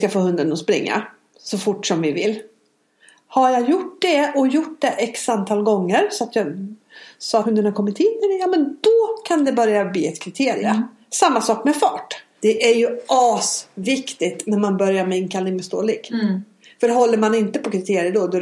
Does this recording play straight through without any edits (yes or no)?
no